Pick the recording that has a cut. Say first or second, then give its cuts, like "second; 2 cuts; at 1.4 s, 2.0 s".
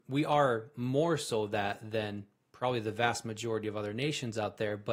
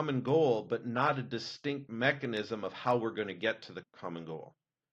second; 1 cut; at 3.8 s